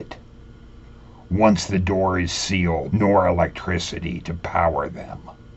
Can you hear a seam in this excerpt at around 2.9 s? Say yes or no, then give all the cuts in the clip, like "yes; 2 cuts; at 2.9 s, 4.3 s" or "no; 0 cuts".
yes; 1 cut; at 2.9 s